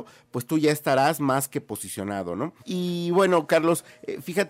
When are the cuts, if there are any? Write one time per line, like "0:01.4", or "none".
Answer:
0:02.6